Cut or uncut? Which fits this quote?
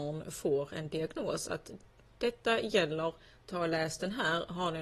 uncut